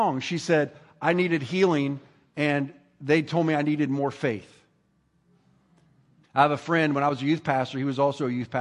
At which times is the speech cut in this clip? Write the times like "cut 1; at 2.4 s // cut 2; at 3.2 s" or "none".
cut 1; at 6.2 s